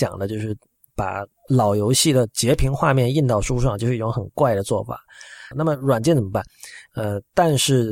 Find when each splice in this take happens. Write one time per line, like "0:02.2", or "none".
0:05.5
0:06.9